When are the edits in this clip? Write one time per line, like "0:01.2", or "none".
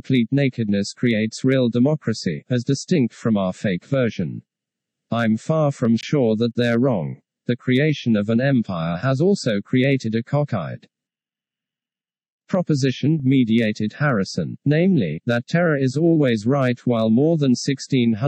none